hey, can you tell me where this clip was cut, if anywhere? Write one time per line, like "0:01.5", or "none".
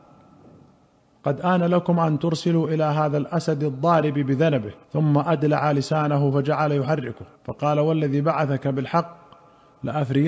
0:04.8
0:07.3